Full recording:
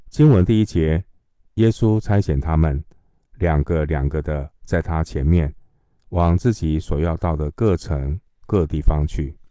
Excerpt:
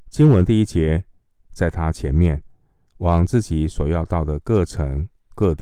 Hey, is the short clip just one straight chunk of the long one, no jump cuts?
no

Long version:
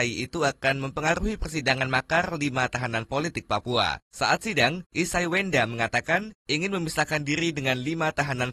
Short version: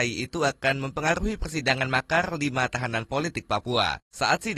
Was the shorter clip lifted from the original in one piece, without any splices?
yes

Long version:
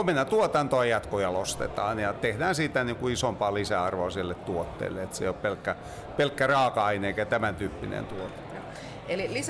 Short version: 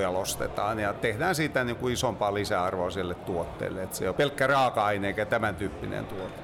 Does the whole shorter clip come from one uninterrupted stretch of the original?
no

